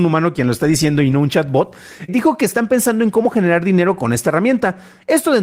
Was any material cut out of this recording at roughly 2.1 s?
yes; 1 cut; at 2.1 s

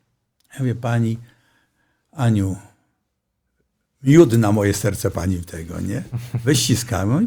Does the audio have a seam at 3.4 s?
no; 0 cuts

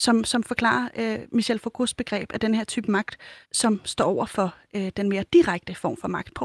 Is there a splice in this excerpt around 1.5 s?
no; 1 cut; at 3.4 s

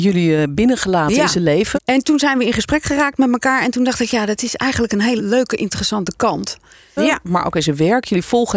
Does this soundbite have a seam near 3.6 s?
no; 3 cuts; at 1.7 s, 5.2 s, 7.0 s

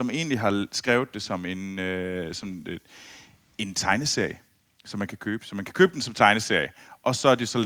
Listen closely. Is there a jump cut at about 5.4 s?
no; 0 cuts

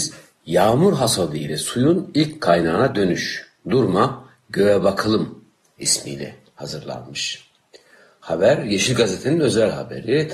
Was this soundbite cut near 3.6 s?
no; 0 cuts

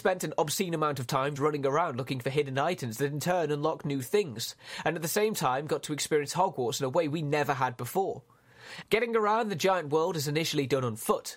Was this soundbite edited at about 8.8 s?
yes; 2 cuts; at 1.4 s, 8.8 s

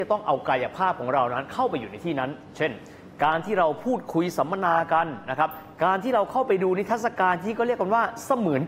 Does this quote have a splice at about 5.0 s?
no; 0 cuts

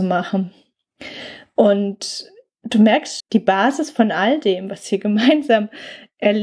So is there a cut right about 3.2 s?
yes; 1 cut; at 3.2 s

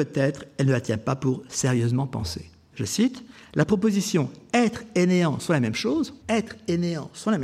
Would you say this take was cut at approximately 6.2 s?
yes; 2 cuts; at 2.7 s, 6.2 s

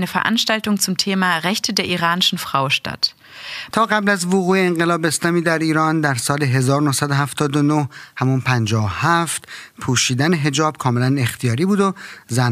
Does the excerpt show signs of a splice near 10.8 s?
no; 1 cut; at 3.7 s

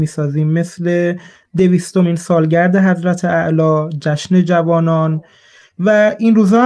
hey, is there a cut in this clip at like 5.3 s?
no; 0 cuts

